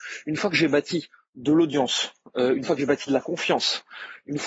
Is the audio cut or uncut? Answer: uncut